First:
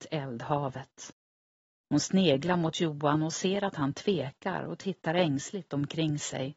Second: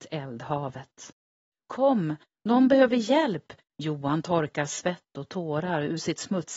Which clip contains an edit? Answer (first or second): second